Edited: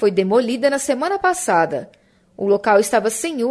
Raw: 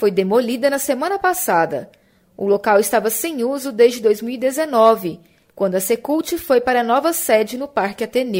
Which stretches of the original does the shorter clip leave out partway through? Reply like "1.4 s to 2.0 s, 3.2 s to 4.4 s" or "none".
none